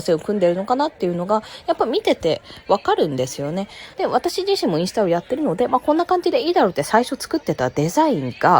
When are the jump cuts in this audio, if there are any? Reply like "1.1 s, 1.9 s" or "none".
3.9 s